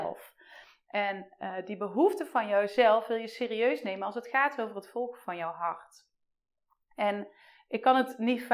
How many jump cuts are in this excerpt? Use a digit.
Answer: 0